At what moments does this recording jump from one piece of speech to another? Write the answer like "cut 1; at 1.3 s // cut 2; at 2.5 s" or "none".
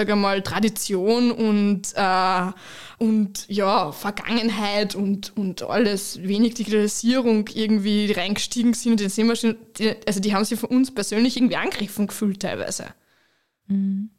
cut 1; at 3.0 s

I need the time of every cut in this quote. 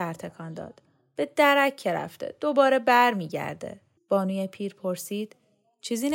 cut 1; at 4.0 s

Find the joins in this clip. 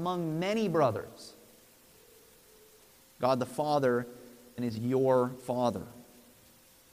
cut 1; at 3.0 s // cut 2; at 4.6 s

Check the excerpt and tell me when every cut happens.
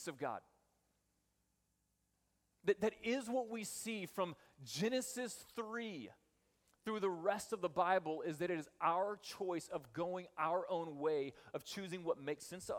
none

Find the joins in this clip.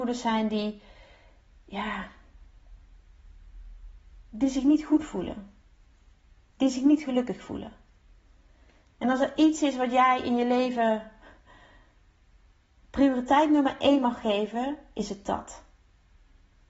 none

